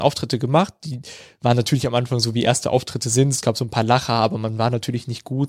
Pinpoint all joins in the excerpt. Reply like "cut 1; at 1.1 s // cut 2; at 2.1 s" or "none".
none